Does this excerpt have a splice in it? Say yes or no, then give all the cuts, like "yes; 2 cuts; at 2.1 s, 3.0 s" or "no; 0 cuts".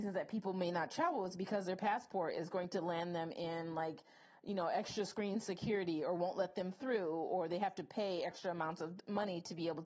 no; 0 cuts